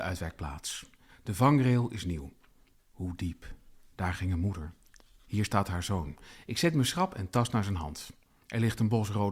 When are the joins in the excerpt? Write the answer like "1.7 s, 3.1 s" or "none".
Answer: 1.1 s, 2.7 s